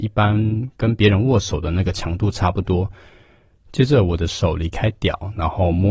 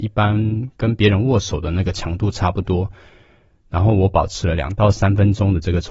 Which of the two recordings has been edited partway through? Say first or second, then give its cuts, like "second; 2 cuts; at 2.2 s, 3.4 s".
first; 1 cut; at 3.5 s